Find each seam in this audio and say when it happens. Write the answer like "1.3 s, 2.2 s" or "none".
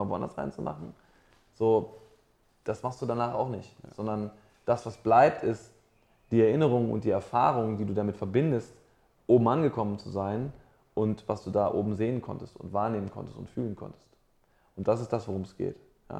none